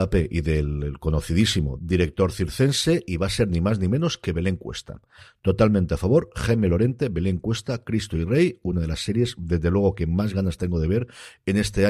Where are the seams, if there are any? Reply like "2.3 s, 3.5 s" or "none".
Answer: none

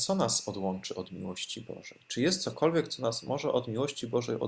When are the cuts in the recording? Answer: none

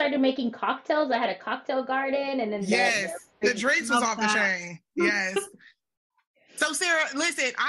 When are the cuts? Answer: 3.4 s

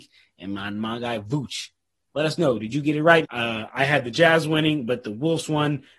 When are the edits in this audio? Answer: 2.1 s, 3.2 s

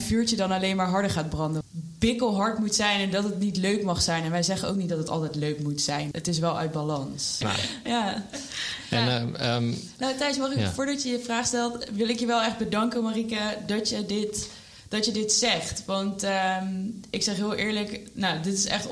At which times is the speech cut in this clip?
1.6 s, 6.1 s, 7.4 s

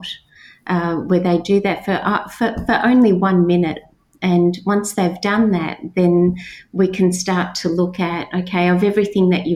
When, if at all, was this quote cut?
none

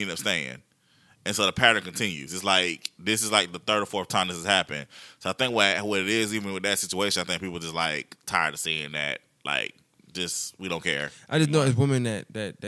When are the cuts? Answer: none

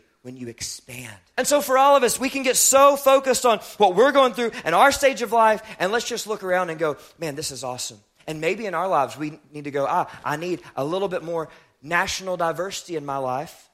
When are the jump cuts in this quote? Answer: 1.3 s

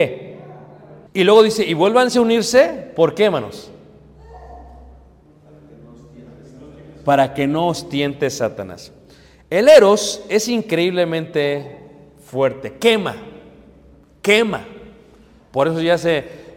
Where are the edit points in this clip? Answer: 1.1 s

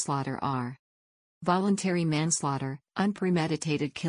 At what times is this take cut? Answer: 2.9 s

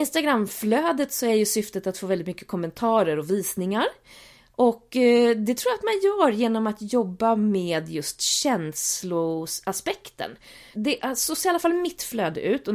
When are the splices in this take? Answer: 10.7 s

